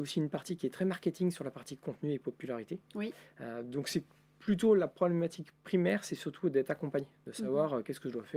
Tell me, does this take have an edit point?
no; 0 cuts

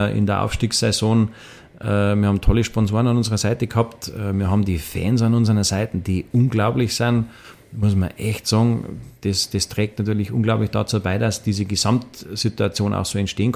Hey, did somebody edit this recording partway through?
no; 0 cuts

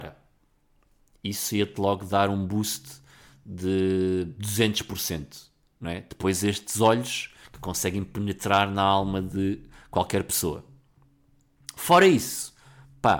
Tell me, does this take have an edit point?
no; 0 cuts

